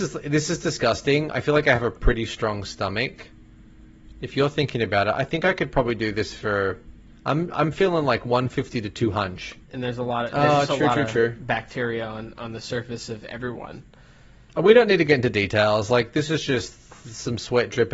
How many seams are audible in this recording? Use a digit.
1